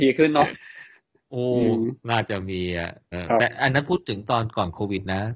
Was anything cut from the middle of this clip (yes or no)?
yes